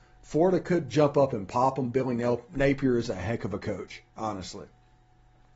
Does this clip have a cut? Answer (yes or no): no